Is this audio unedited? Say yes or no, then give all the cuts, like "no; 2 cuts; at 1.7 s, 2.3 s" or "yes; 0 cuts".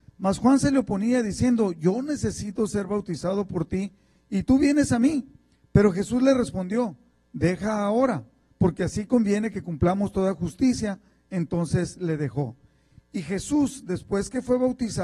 yes; 0 cuts